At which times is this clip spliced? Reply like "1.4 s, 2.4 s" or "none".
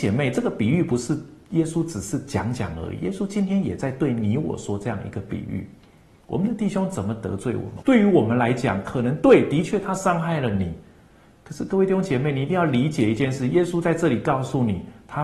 7.8 s